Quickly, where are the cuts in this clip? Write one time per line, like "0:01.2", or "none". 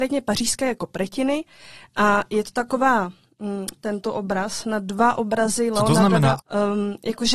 0:03.8
0:06.4